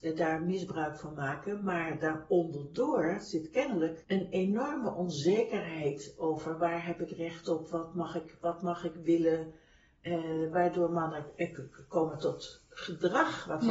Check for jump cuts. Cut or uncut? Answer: uncut